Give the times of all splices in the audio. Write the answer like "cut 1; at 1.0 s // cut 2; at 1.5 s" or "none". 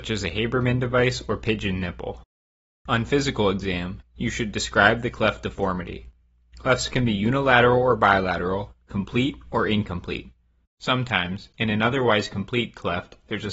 cut 1; at 10.7 s